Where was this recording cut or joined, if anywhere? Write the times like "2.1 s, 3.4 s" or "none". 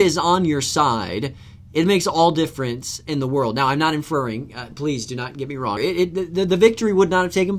5.8 s

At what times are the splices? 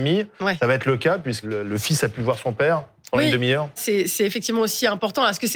1.4 s, 3.8 s

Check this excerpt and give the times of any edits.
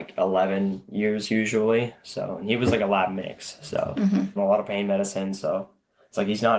4.4 s

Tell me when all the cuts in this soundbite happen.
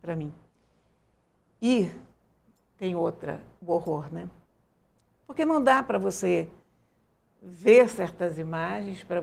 none

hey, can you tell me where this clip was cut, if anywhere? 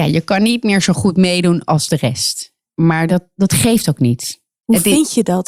none

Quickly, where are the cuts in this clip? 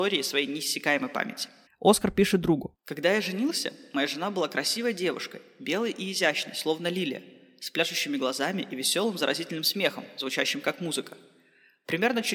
1.7 s

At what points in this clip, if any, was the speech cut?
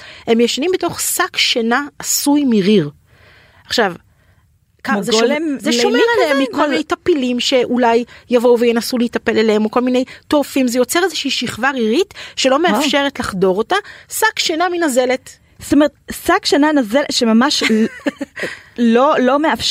none

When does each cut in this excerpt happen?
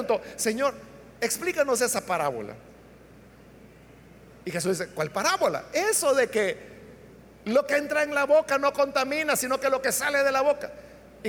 none

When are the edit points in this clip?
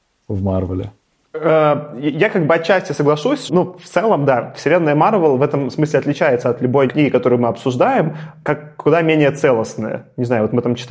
3.5 s, 6.9 s

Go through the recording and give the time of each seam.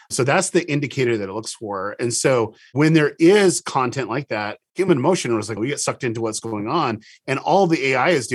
5.6 s

